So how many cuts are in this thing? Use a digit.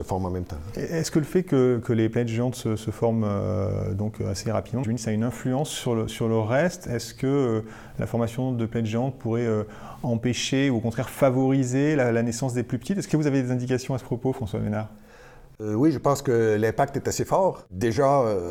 1